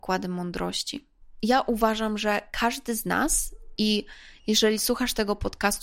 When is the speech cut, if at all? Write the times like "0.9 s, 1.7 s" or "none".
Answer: none